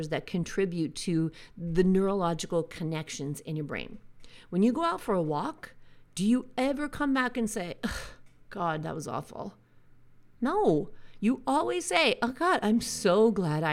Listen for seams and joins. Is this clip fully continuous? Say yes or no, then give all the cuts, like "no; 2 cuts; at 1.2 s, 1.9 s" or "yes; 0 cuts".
yes; 0 cuts